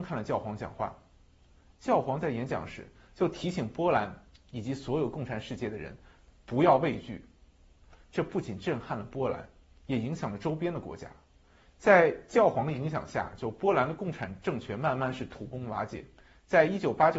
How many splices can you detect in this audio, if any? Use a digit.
0